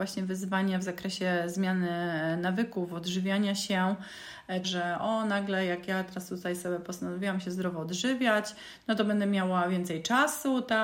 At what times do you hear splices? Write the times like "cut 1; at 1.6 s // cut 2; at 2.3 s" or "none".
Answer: cut 1; at 4.6 s